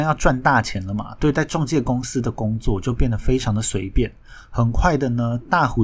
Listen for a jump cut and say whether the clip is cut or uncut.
uncut